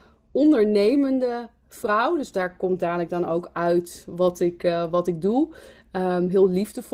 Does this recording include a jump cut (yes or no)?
no